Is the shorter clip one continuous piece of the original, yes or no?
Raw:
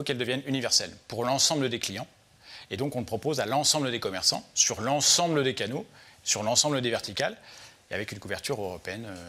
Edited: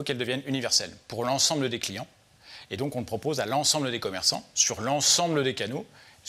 yes